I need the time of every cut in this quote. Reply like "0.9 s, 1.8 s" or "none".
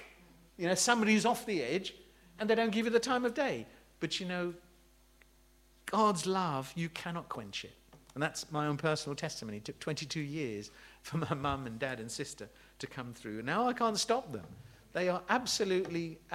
none